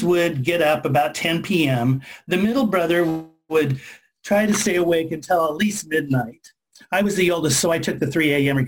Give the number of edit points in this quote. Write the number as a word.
zero